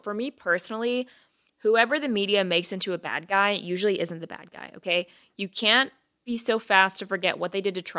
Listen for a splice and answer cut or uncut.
uncut